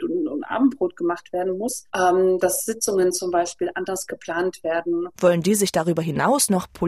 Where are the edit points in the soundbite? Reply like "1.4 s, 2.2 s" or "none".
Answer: 1.9 s, 5.1 s